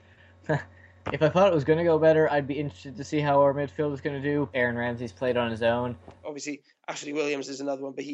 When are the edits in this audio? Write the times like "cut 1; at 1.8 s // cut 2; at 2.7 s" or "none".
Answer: cut 1; at 4.5 s // cut 2; at 6.2 s